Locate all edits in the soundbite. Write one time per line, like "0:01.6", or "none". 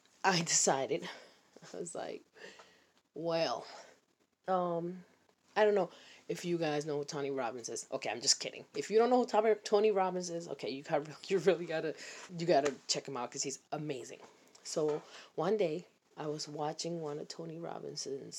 0:11.2
0:12.3